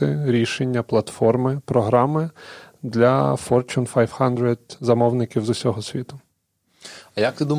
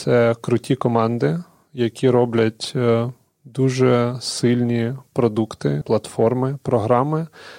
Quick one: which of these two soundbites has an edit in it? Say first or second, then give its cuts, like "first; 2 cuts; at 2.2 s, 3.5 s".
second; 1 cut; at 5.8 s